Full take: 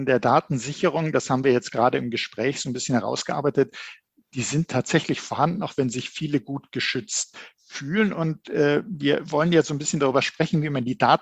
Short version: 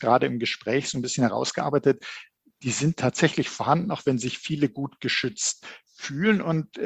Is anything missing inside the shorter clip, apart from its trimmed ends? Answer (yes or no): no